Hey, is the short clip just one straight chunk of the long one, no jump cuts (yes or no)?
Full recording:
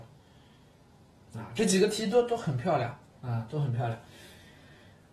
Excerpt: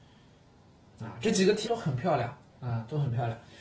no